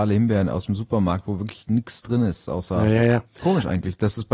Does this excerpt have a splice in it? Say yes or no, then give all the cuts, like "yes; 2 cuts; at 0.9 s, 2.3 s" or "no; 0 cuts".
yes; 1 cut; at 3.3 s